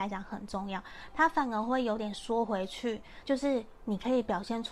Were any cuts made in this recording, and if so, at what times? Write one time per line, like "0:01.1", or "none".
0:03.2